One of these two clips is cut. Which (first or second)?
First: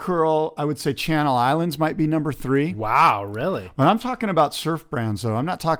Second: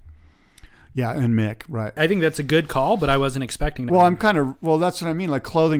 second